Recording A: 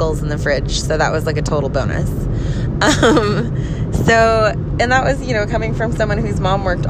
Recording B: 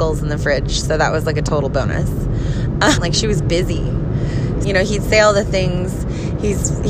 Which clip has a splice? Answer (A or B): B